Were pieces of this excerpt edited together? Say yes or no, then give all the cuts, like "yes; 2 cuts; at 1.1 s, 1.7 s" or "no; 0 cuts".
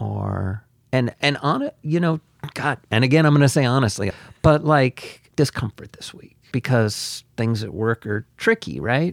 yes; 3 cuts; at 4.1 s, 5.3 s, 6.5 s